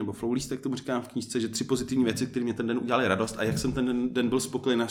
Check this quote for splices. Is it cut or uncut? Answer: uncut